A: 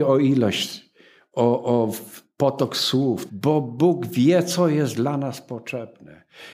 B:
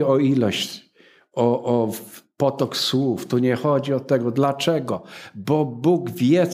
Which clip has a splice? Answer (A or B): A